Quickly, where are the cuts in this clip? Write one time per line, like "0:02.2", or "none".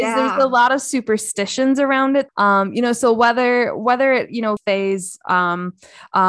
0:02.3
0:04.6